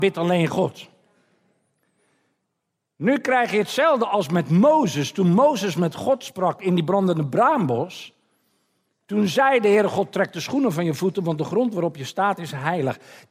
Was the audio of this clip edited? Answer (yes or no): no